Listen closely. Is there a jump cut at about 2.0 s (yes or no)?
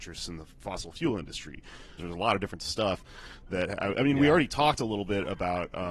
yes